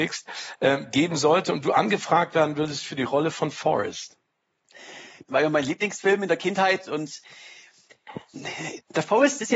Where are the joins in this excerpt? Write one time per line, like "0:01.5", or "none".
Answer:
0:05.3